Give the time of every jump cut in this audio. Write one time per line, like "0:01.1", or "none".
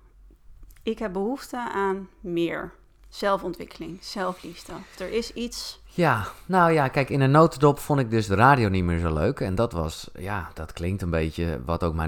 none